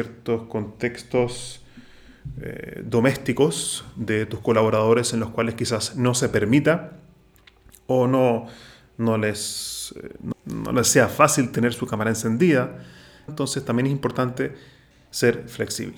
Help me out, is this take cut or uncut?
cut